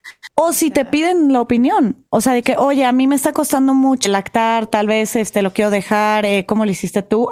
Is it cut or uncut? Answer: uncut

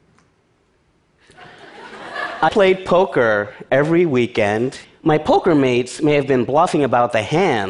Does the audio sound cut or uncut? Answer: cut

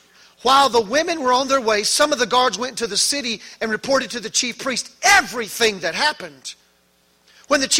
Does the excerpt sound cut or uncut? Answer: uncut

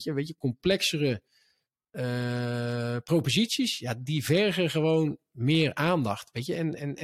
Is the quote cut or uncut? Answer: uncut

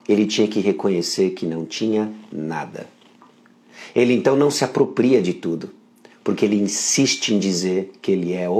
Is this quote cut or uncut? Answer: uncut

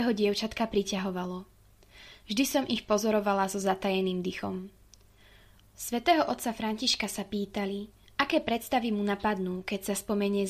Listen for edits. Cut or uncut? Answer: cut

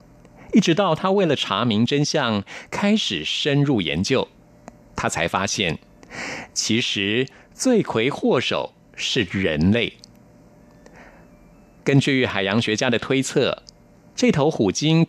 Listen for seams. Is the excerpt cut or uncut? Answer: uncut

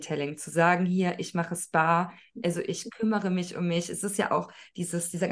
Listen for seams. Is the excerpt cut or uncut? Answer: uncut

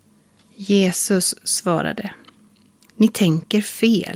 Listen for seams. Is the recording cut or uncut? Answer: uncut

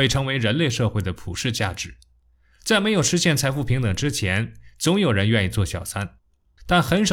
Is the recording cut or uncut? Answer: uncut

